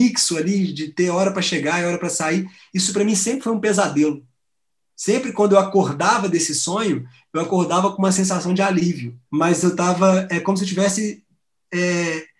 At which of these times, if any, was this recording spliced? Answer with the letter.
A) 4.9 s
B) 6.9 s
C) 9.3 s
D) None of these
C